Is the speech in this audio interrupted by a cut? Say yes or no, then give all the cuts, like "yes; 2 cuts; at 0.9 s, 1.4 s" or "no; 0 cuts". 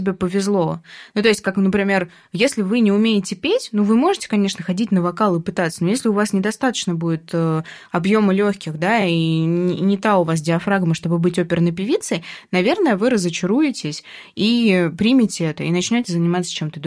no; 0 cuts